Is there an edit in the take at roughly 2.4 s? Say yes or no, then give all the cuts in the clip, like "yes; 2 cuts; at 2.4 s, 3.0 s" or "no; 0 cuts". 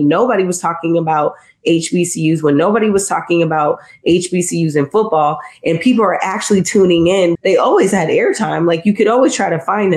no; 1 cut; at 7.3 s